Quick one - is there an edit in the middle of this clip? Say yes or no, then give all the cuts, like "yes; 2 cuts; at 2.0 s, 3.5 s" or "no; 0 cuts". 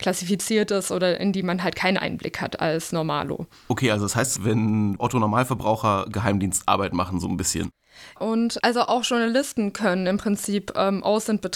yes; 2 cuts; at 4.4 s, 8.2 s